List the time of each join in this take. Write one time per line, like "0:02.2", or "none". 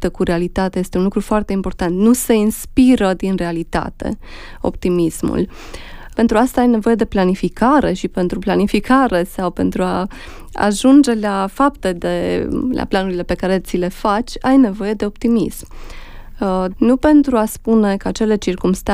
0:06.1
0:16.7